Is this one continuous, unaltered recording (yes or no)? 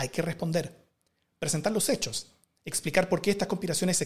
yes